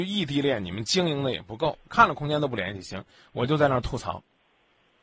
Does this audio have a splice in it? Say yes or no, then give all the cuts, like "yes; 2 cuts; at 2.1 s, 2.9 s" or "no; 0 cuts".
yes; 1 cut; at 1.9 s